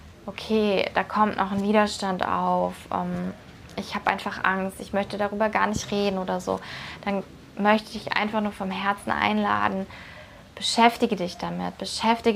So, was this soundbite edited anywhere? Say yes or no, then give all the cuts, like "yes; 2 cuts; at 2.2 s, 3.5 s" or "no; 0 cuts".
no; 0 cuts